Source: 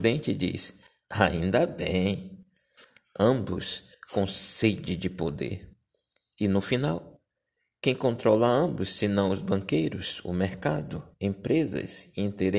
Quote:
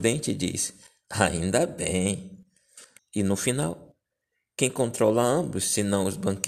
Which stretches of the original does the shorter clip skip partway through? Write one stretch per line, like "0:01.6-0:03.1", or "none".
0:03.0-0:06.2